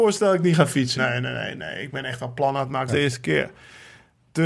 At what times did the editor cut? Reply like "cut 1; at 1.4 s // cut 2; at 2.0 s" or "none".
cut 1; at 1.0 s // cut 2; at 2.9 s